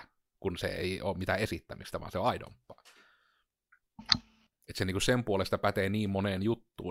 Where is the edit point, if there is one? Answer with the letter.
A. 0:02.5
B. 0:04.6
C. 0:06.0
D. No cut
B